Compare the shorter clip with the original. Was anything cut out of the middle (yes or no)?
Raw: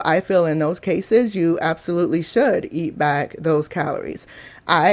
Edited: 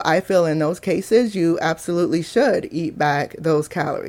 no